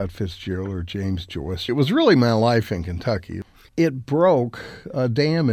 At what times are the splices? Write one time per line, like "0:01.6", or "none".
0:01.7
0:03.7